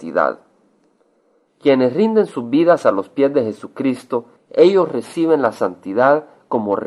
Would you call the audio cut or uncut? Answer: cut